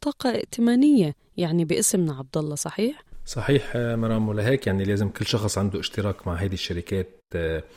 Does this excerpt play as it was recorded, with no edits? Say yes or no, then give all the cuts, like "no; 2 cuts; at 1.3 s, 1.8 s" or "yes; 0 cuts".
yes; 0 cuts